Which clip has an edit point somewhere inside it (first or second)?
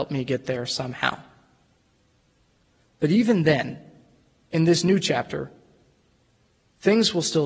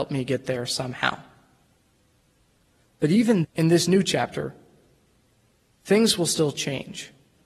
second